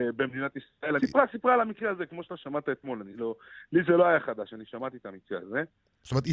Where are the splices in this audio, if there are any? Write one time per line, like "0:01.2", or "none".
0:01.0